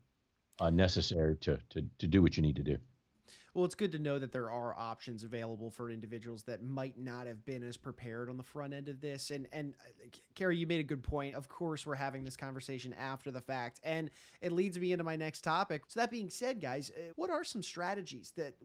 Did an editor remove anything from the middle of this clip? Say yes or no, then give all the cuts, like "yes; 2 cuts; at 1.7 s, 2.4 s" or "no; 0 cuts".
yes; 3 cuts; at 11.3 s, 15.8 s, 17.1 s